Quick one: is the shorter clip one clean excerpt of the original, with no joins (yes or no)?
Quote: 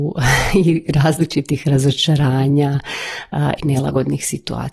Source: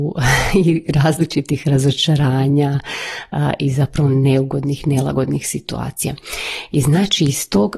no